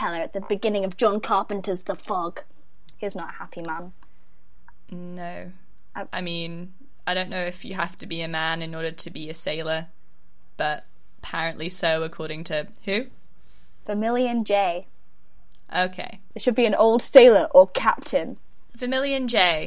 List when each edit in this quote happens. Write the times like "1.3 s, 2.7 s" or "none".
16.3 s, 18.7 s

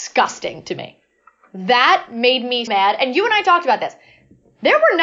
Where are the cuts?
2.7 s

